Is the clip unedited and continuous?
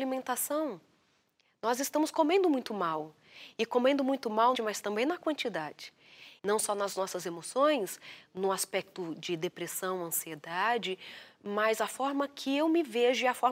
no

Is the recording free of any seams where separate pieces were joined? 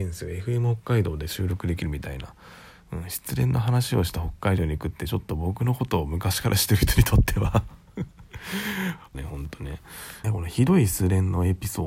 no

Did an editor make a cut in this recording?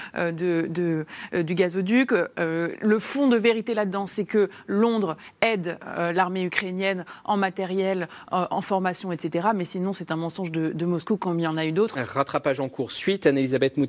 yes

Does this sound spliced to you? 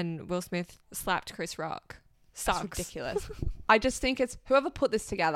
no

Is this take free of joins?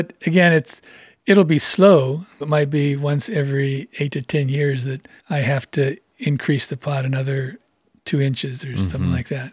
no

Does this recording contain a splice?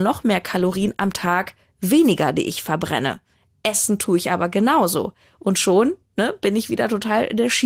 no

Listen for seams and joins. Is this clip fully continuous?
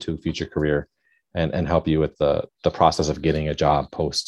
no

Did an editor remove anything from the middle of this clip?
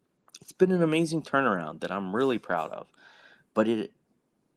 no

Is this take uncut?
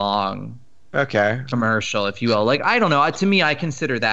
yes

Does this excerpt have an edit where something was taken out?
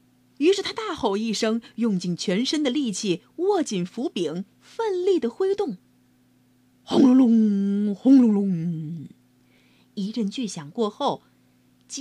no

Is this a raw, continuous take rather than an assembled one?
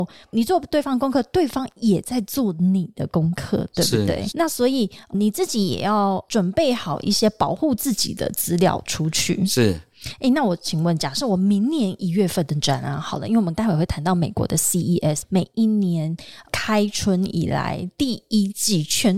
no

